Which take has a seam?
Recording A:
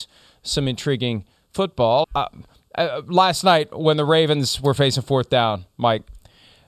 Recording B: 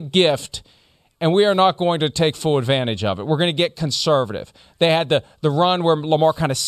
A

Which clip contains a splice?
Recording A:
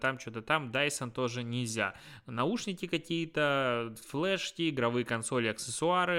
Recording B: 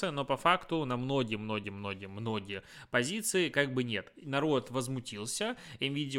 B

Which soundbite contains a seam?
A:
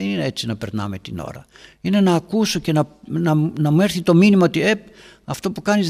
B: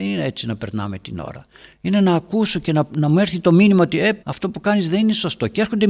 B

